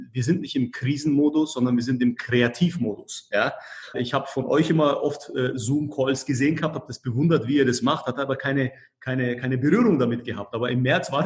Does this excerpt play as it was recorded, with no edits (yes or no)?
no